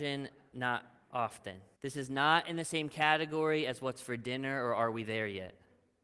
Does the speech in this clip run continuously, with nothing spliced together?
no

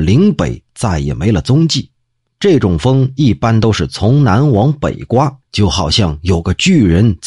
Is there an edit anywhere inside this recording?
yes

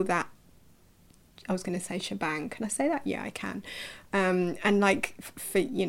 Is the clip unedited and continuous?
yes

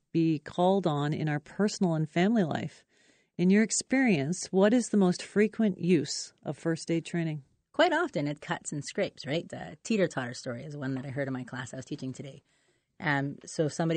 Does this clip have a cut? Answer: yes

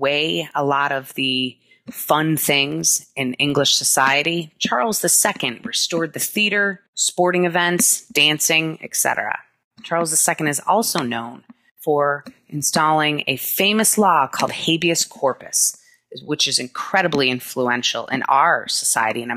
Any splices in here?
no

